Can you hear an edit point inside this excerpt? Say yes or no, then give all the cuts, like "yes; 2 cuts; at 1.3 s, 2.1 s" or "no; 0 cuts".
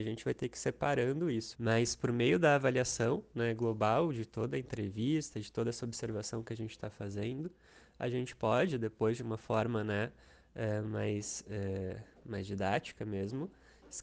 yes; 1 cut; at 1.5 s